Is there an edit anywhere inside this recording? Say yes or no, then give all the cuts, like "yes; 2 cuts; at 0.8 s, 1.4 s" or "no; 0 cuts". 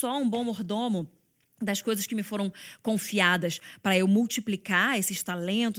no; 0 cuts